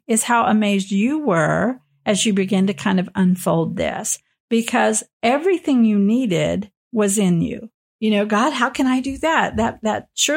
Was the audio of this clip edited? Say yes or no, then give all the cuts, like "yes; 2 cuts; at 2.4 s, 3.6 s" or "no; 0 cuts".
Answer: yes; 1 cut; at 7.9 s